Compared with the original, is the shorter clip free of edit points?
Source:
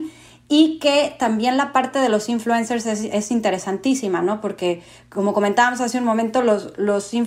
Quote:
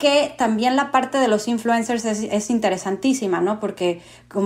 yes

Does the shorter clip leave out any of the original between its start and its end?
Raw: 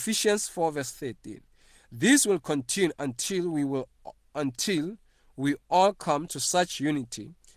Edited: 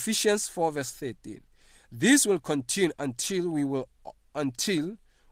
no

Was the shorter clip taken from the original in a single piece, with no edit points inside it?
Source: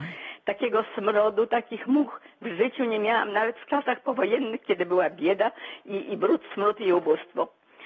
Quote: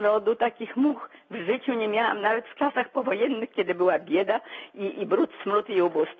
yes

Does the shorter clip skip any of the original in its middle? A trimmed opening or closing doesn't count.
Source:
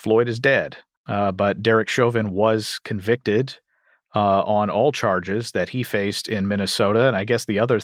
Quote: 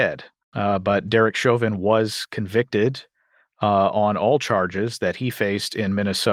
no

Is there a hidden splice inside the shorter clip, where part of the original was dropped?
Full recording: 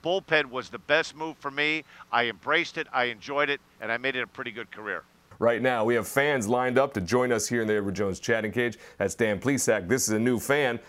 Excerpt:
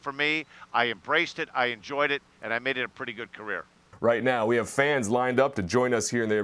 no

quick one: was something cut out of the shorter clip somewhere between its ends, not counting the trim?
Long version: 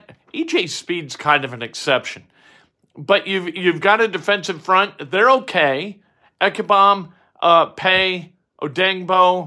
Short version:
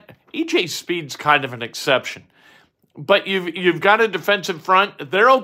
no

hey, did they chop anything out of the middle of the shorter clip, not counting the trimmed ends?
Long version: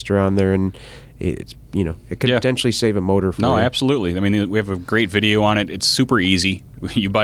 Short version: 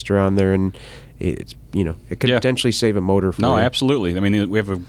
no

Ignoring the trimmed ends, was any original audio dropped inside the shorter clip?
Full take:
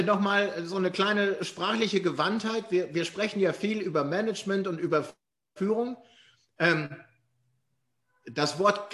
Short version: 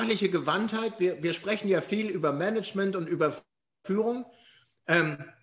no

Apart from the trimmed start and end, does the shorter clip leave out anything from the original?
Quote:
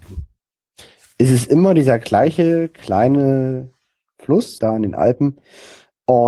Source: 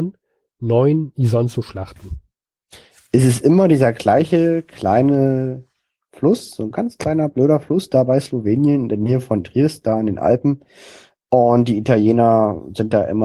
yes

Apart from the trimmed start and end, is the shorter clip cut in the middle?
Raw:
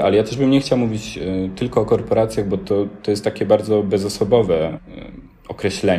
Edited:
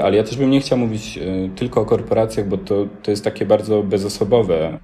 no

